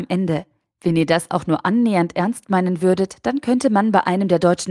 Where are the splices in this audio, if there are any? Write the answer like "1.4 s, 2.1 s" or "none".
none